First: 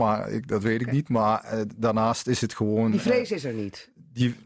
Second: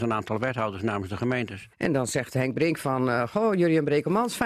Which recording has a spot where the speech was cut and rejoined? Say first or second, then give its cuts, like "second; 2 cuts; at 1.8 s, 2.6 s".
second; 1 cut; at 1.7 s